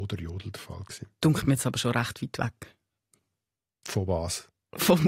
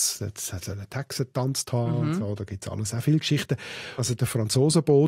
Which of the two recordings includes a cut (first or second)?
second